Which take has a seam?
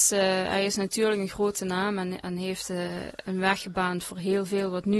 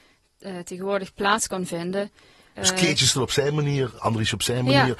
second; 1 cut; at 2.5 s

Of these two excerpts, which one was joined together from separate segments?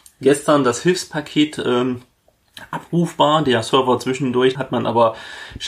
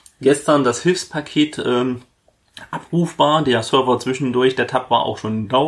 first; 1 cut; at 4.5 s

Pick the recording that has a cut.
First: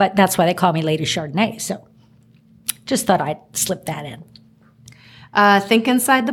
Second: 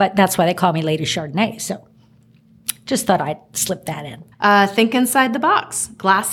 second; 1 cut; at 4.3 s

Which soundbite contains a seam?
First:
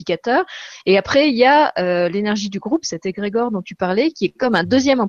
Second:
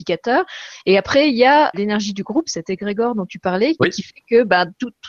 second; 2 cuts; at 1.7 s, 3.8 s

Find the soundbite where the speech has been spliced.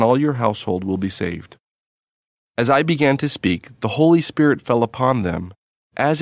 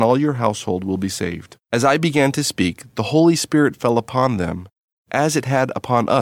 second; 1 cut; at 1.6 s

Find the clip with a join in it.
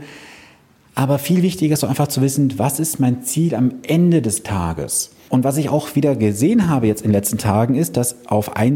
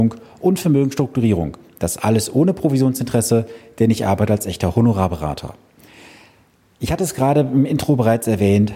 first; 1 cut; at 5.3 s

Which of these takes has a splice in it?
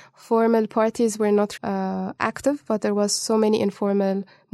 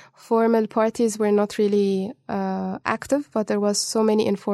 first; 1 cut; at 1.6 s

